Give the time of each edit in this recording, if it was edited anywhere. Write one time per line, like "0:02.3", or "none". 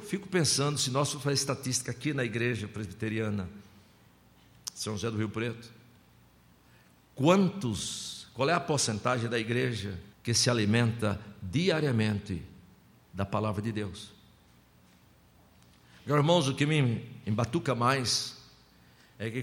0:10.1